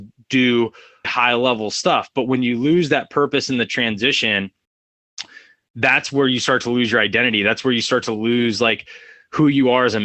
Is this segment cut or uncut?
cut